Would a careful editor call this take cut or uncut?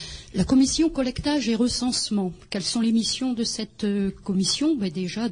uncut